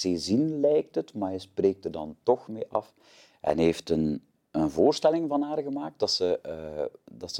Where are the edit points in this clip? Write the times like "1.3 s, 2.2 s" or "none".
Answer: none